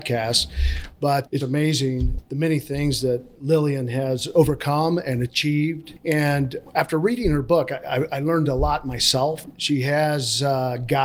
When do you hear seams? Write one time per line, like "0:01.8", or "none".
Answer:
0:01.4